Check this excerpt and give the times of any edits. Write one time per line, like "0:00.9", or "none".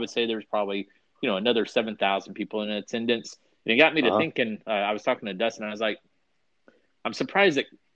none